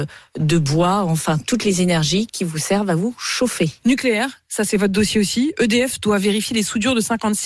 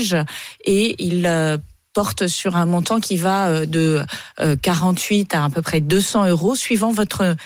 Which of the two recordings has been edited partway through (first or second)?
first